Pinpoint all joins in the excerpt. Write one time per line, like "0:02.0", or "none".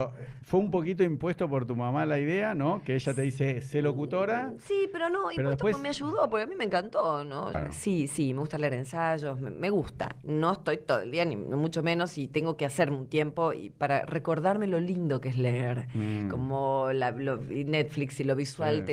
0:07.5